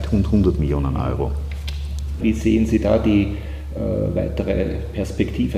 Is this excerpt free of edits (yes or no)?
no